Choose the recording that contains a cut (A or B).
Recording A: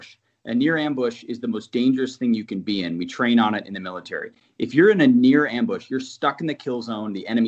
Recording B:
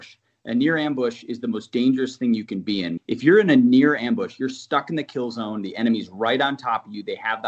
B